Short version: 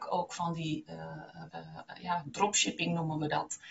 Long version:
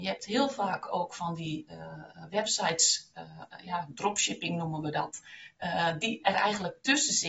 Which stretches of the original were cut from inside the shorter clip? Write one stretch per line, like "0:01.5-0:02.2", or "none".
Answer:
0:02.3-0:03.1